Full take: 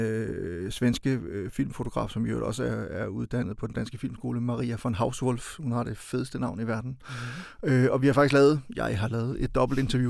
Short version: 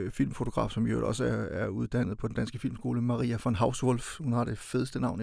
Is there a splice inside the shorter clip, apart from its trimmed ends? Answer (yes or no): no